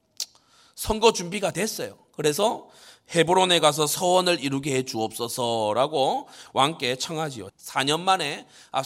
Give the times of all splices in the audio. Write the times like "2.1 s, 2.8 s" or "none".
7.5 s